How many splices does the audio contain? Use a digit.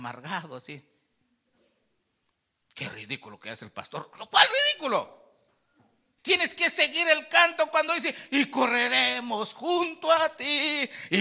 1